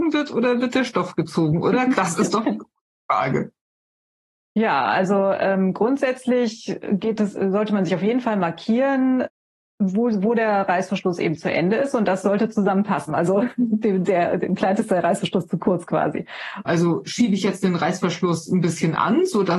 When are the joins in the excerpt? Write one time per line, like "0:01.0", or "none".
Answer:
0:01.9
0:13.1
0:16.6

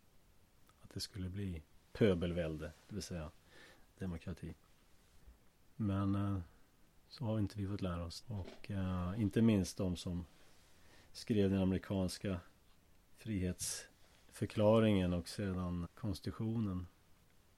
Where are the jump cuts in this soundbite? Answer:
0:08.2
0:15.8

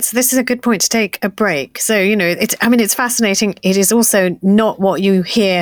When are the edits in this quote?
none

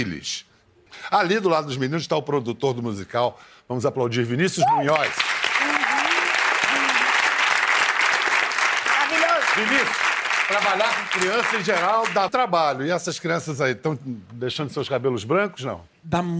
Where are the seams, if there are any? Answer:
0:12.3

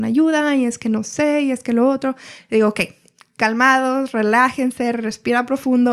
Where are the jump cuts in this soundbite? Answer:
none

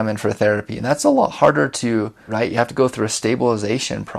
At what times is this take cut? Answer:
0:02.3

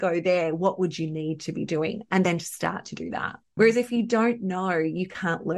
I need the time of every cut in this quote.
0:03.6

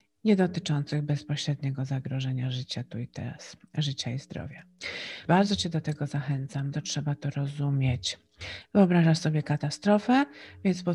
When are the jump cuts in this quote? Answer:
0:05.3
0:06.7
0:08.6

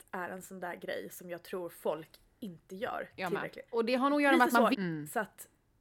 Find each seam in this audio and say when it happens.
0:03.7
0:04.7

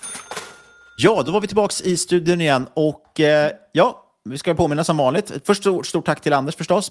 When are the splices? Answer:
none

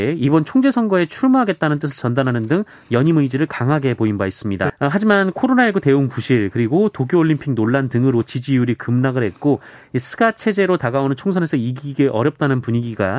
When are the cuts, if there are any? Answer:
0:04.7

